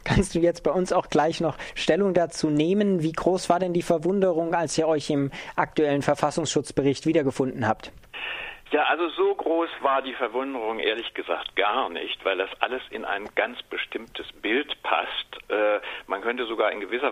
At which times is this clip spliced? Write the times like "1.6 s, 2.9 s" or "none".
none